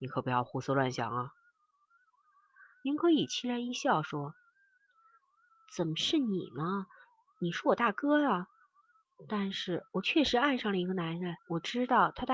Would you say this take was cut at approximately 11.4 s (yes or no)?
yes